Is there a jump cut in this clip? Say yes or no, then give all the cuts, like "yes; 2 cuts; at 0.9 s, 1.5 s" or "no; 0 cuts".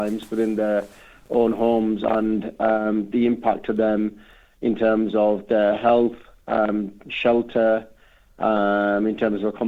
no; 0 cuts